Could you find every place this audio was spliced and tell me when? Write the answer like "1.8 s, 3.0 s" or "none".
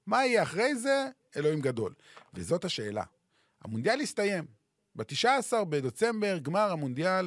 none